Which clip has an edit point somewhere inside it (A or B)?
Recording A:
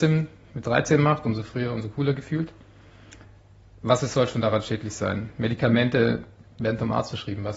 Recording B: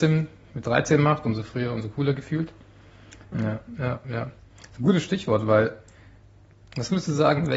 B